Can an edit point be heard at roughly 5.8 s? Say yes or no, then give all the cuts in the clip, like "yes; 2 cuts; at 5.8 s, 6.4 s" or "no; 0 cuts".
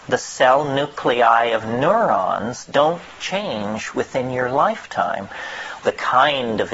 yes; 1 cut; at 5.8 s